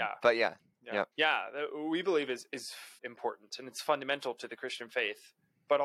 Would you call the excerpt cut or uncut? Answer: cut